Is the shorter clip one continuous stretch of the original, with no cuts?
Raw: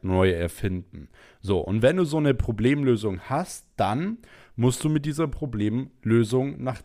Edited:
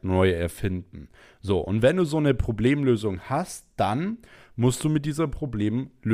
yes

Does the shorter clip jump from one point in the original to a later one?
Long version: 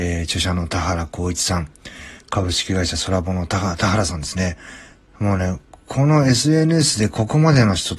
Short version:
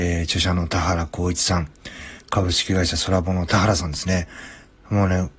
yes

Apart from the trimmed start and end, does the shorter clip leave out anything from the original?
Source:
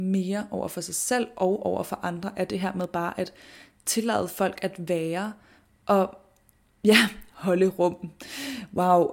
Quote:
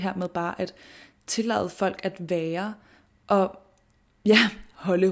no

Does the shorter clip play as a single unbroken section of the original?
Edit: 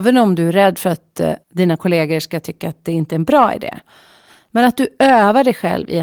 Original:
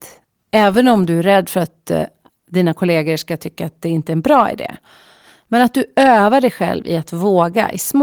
no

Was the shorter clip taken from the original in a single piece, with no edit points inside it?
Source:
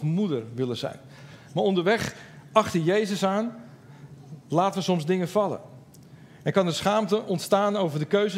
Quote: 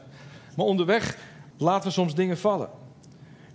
no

